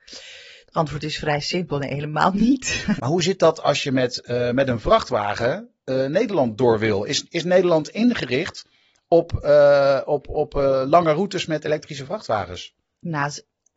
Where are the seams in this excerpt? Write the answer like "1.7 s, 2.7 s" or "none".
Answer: 3.0 s